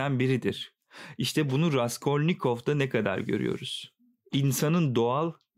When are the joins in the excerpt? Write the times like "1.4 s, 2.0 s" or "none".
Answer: none